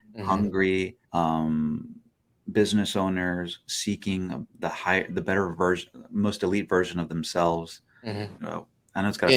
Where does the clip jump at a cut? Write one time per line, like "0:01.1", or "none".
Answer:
0:01.0
0:08.4